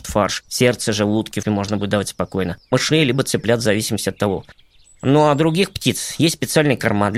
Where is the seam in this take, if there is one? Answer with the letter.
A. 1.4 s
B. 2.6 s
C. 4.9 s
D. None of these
A